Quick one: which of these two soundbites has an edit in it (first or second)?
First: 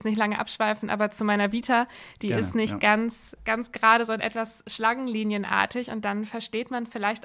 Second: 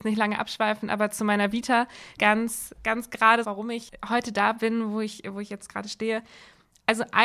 second